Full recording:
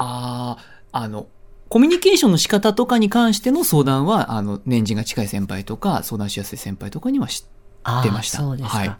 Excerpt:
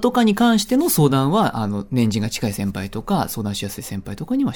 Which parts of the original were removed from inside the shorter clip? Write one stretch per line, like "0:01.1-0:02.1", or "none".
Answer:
none